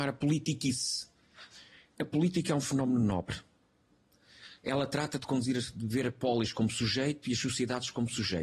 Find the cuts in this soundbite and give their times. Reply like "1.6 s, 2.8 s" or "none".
none